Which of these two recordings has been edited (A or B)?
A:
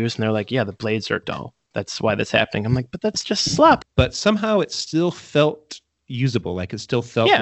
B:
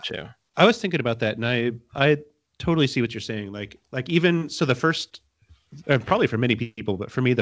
A